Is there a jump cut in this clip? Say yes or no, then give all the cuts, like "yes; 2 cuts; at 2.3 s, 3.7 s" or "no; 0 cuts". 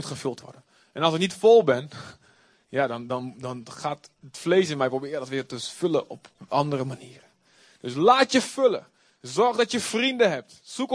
no; 0 cuts